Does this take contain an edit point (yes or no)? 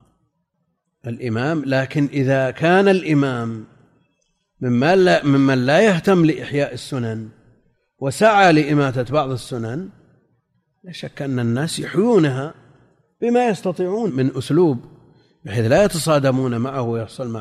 yes